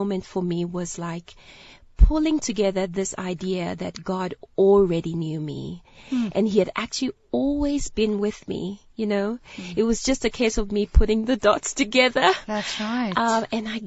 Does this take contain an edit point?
no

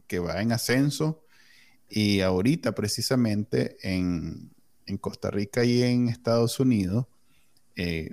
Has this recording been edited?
no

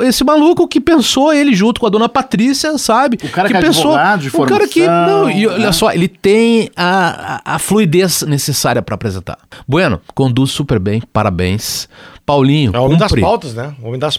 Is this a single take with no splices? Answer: yes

